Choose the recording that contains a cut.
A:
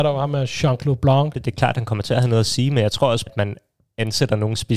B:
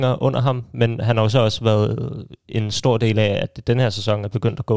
A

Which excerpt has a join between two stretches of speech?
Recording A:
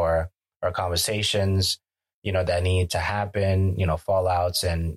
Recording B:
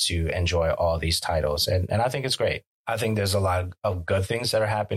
B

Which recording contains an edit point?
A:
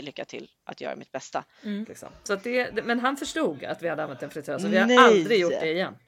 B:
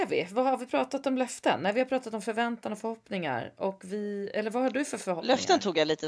A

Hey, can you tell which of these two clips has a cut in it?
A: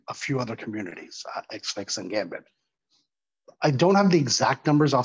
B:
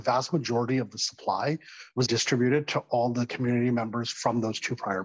B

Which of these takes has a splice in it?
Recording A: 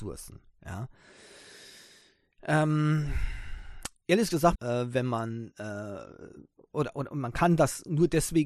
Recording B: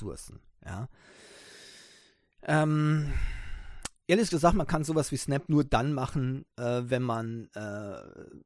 A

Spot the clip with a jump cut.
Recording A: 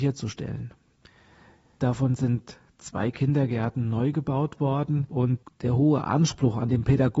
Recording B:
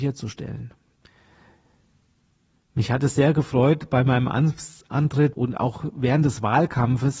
A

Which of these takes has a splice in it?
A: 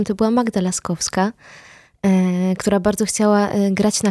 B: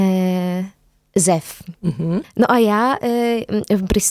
B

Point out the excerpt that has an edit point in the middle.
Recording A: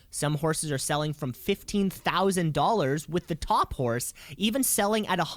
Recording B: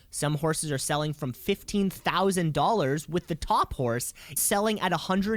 B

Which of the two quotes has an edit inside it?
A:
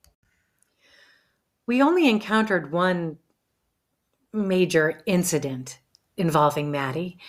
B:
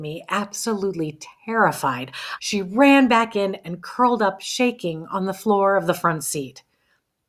B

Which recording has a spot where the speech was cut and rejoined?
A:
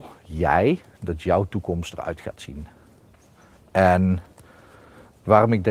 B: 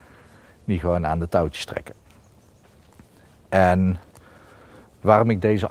A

